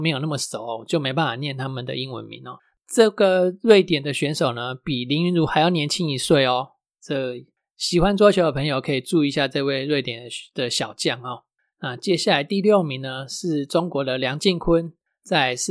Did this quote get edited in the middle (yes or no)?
no